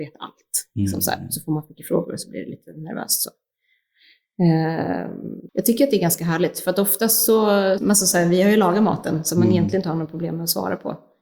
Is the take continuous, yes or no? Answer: no